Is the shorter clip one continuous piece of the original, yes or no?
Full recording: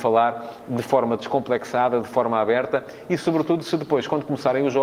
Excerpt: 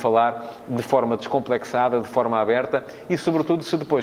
yes